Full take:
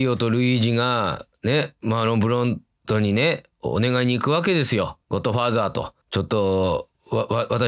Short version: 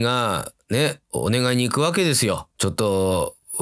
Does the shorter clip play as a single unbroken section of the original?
no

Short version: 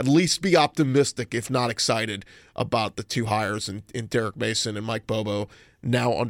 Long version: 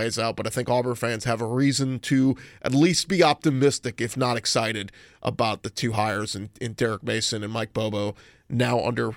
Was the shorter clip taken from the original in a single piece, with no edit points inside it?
yes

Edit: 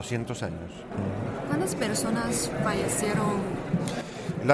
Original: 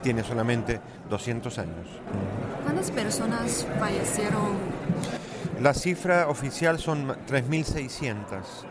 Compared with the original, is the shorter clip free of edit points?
yes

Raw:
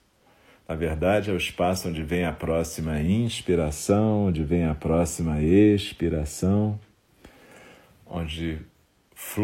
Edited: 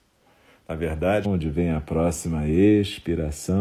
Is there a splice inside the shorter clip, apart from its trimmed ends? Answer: yes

